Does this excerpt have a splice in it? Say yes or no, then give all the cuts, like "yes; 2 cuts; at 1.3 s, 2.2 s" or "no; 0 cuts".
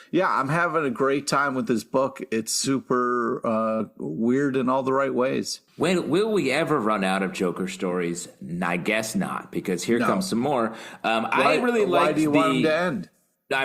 yes; 1 cut; at 5.7 s